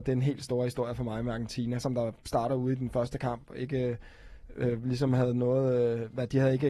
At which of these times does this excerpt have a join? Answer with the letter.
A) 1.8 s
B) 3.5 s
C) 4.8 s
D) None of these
A